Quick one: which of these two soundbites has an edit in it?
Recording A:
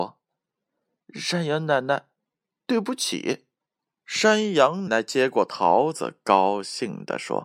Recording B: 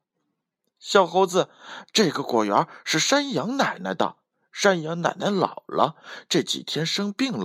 A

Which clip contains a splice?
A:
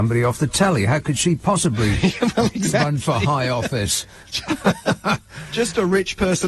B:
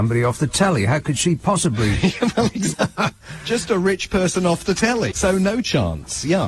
B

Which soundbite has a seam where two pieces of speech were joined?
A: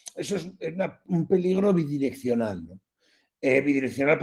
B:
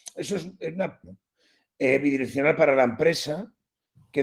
B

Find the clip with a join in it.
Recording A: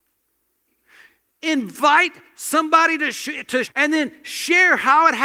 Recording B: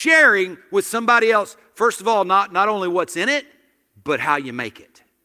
A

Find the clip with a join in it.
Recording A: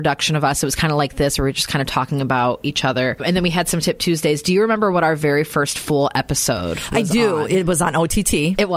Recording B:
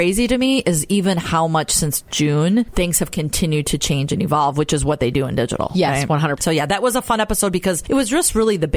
B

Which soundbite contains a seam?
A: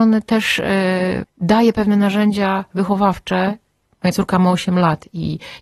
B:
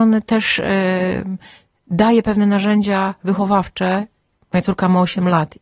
A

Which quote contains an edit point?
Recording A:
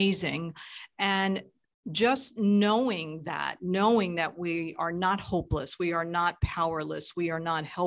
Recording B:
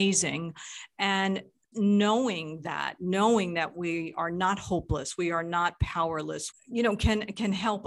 B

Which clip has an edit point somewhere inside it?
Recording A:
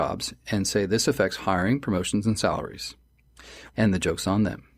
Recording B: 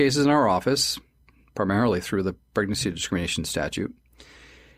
A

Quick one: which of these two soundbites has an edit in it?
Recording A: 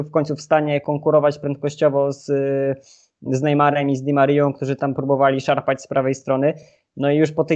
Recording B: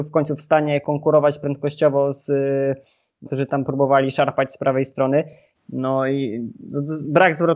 B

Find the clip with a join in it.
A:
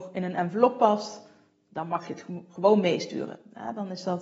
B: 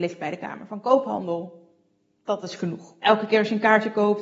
B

